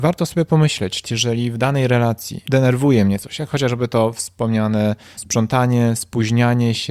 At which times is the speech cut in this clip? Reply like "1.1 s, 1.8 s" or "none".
1.0 s, 5.2 s